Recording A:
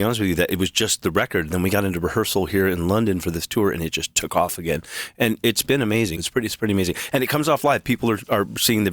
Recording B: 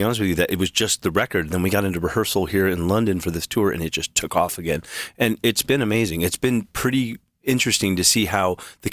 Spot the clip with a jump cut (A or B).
A